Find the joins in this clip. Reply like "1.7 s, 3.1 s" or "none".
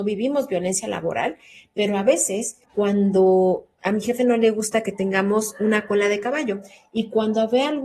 2.6 s

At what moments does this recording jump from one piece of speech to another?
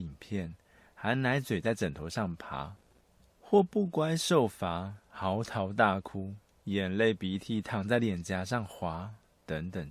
none

